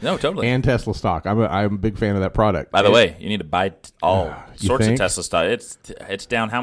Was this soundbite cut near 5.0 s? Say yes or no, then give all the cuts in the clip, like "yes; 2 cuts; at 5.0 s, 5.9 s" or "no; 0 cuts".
no; 0 cuts